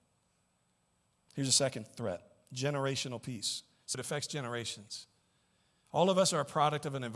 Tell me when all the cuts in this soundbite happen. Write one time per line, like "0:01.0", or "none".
0:03.9